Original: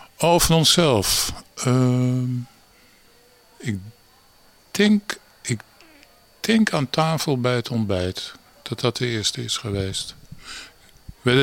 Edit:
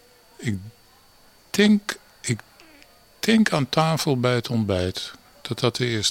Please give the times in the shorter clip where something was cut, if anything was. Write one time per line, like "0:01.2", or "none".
none

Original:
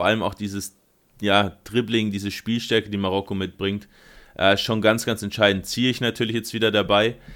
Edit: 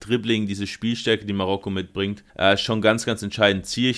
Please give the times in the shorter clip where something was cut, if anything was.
0:02.3

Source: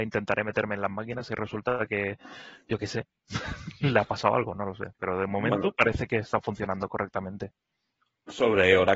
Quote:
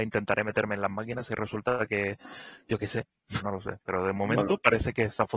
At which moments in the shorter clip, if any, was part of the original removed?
0:03.4

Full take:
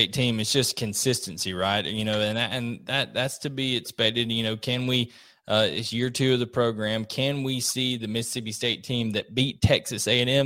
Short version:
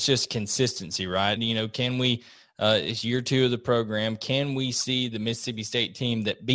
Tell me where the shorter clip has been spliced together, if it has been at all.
0:01.4

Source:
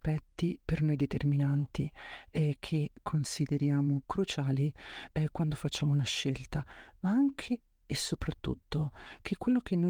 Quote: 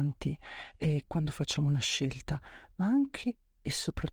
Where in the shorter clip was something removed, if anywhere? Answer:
0:01.1

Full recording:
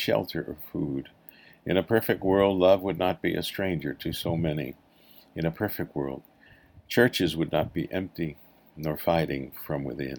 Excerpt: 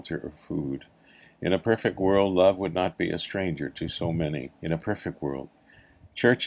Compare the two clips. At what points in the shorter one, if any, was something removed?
0:04.6

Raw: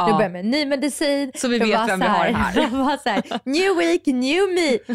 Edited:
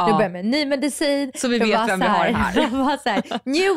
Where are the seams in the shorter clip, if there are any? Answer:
none

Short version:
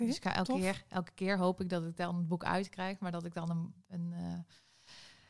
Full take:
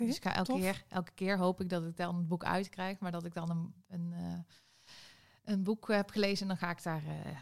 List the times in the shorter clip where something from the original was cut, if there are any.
none

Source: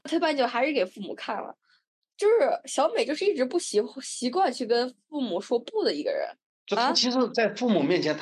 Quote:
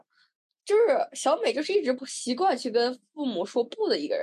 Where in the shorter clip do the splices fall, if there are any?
0:02.0

